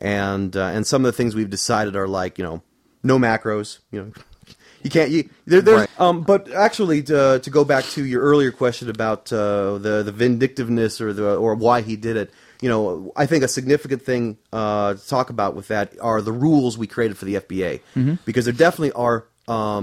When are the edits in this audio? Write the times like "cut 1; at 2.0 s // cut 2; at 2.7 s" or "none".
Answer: cut 1; at 5.9 s